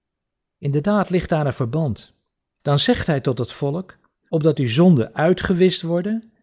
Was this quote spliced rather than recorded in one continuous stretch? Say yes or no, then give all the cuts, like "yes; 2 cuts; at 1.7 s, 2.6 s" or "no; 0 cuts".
yes; 2 cuts; at 2.4 s, 4.2 s